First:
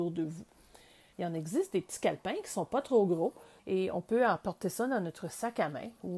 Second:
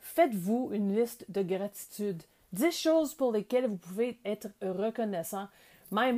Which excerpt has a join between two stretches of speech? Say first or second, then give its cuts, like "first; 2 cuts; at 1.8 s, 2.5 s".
first; 2 cuts; at 1.1 s, 3.6 s